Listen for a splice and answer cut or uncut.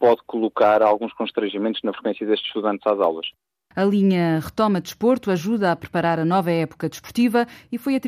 cut